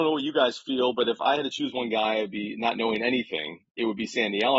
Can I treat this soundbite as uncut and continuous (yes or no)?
yes